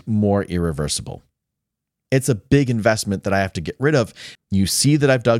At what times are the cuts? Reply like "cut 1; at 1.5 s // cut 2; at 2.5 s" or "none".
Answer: cut 1; at 2.0 s // cut 2; at 4.3 s